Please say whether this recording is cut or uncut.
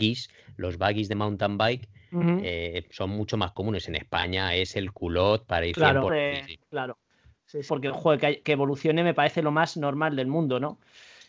cut